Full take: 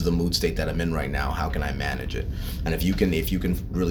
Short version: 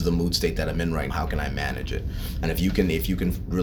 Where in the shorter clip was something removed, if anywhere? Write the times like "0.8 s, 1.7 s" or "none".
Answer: 1.1 s